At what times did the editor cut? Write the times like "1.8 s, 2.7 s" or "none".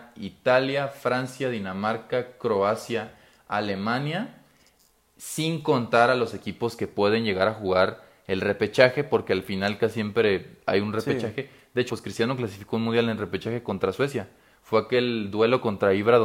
11.9 s